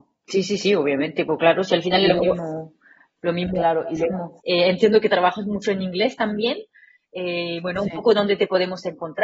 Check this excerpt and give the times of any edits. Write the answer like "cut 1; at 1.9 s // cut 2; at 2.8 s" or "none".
cut 1; at 4.4 s